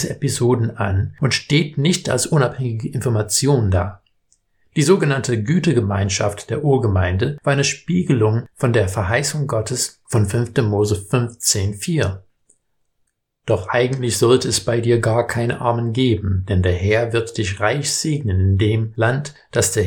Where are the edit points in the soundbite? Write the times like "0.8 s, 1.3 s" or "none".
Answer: none